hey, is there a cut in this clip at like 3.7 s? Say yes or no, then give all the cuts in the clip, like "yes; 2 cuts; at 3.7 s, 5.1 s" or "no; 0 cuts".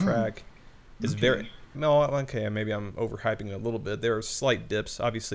no; 1 cut; at 1.7 s